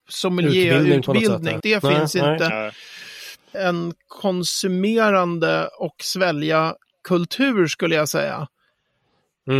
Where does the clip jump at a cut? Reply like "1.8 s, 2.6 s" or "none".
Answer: 1.6 s, 3.5 s